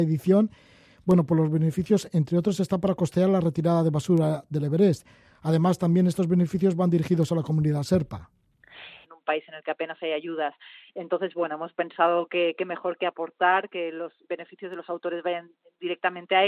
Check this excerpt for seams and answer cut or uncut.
cut